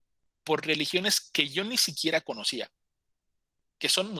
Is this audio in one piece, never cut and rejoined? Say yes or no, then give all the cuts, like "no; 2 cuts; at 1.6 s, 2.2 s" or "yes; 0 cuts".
yes; 0 cuts